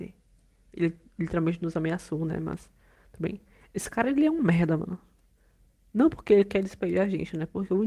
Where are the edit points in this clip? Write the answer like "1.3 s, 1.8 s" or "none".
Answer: none